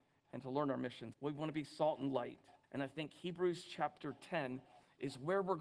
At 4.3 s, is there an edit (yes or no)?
no